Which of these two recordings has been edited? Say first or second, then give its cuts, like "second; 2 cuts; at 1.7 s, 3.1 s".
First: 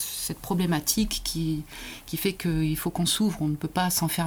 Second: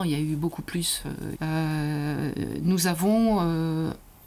second; 1 cut; at 1.3 s